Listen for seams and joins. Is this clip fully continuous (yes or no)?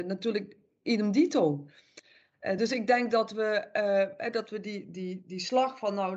yes